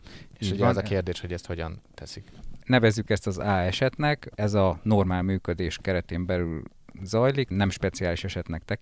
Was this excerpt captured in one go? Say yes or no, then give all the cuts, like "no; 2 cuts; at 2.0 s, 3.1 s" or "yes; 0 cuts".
no; 2 cuts; at 2.6 s, 7.5 s